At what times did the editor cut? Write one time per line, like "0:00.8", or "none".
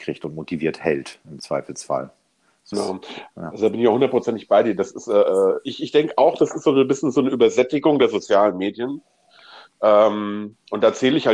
0:02.7